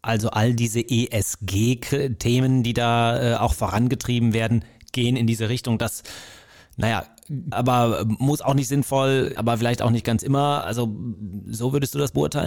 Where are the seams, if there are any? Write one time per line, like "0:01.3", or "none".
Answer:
0:07.5
0:09.4

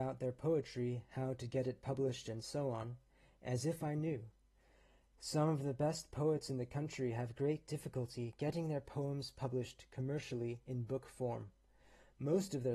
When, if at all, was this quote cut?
none

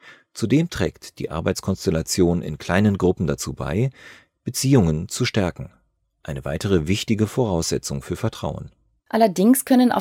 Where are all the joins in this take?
0:09.0

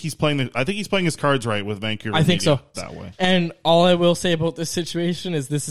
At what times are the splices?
0:02.7

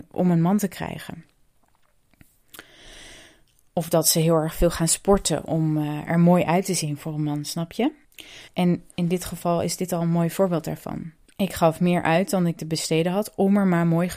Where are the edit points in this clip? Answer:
0:05.5
0:08.5

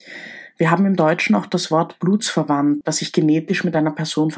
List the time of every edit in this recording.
0:02.8

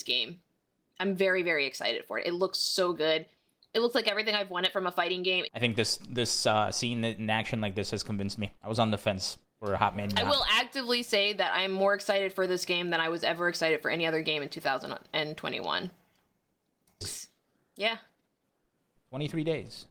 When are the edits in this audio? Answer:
0:05.5
0:08.6
0:17.0

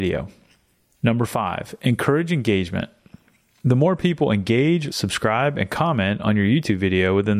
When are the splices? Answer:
0:04.9

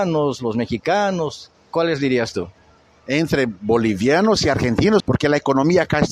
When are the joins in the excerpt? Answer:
0:05.0

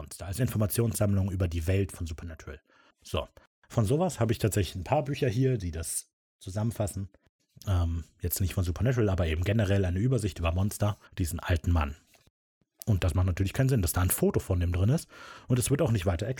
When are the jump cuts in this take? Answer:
0:02.9
0:11.1

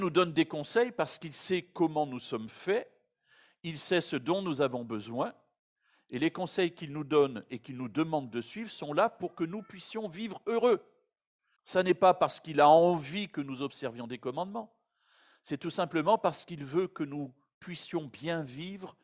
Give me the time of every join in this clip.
0:11.6

